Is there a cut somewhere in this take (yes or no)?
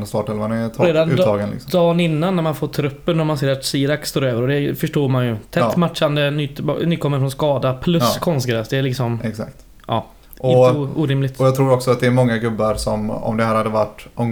no